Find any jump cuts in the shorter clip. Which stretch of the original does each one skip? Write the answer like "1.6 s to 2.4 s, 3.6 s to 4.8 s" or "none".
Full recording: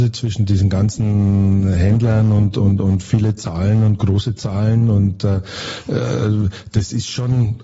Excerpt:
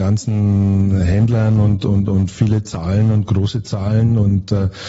none